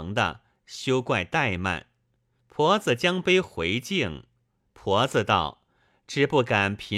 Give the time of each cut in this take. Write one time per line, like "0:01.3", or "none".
0:02.4
0:04.4